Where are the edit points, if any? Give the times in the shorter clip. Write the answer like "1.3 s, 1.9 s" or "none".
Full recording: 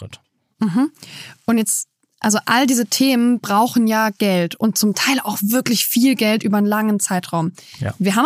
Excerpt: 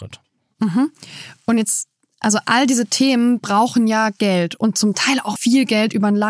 5.4 s